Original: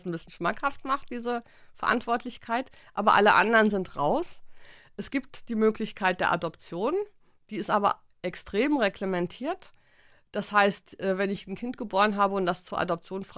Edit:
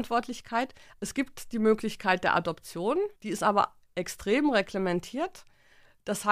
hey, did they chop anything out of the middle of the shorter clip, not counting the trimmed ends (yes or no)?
yes